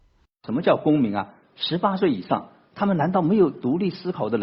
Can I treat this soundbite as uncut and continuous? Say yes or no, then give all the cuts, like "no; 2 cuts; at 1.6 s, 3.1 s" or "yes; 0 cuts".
yes; 0 cuts